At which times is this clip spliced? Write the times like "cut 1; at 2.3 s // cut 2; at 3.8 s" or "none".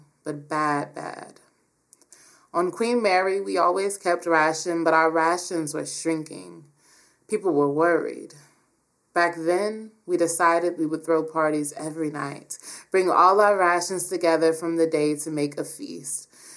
none